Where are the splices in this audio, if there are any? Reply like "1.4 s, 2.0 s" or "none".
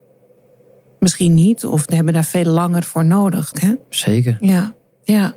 3.5 s